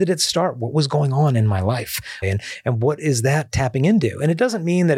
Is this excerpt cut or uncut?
cut